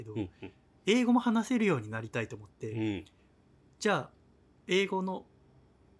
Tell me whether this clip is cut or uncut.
uncut